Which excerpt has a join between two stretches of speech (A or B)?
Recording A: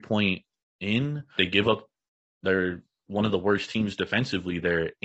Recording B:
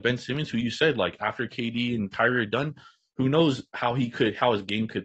A